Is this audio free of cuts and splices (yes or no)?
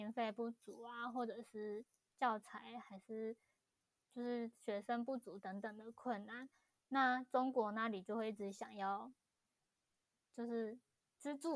yes